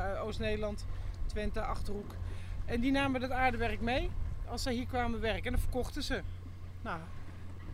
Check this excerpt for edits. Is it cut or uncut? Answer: uncut